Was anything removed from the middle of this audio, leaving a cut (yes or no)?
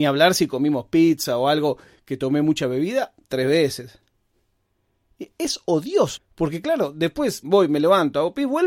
yes